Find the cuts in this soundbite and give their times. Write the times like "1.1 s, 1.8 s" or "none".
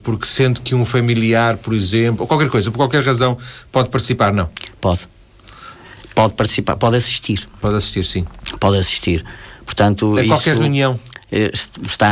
none